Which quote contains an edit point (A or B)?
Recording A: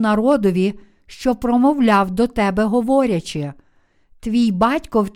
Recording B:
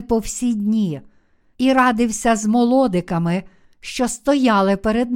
B